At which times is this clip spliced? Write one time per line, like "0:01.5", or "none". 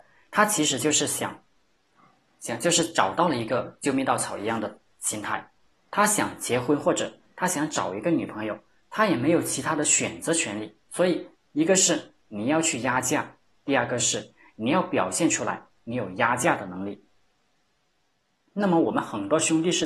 0:11.3